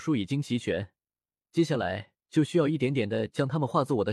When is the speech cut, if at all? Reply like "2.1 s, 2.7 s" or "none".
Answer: none